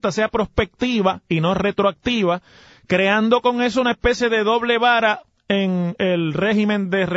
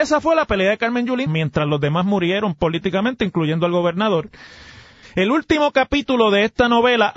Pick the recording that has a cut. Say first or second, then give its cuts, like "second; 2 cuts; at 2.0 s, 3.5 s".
second; 2 cuts; at 1.3 s, 5.0 s